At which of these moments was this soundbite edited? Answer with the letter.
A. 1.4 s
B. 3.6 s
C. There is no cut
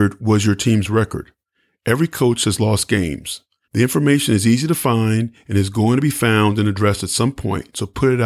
B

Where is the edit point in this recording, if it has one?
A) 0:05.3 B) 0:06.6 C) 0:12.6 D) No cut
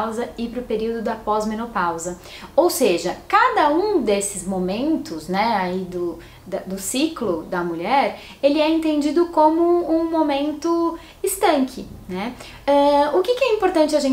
C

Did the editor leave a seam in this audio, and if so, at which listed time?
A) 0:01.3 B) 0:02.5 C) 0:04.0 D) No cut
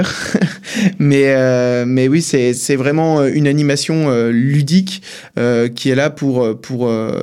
B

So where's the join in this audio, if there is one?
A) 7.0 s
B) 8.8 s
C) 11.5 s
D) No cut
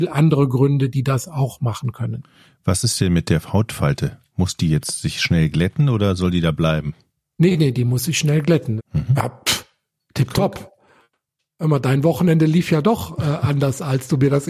B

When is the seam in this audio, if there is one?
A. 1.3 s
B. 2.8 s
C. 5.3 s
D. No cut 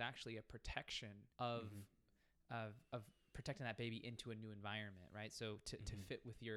A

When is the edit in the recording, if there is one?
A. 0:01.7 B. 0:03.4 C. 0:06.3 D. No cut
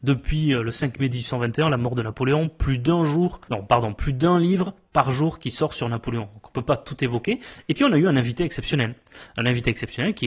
B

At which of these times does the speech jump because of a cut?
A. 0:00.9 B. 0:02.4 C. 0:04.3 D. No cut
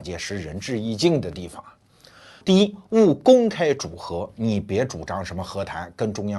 B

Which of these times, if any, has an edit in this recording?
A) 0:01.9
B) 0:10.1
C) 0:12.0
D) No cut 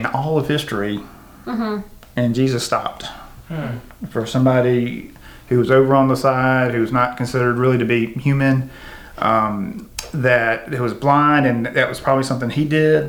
D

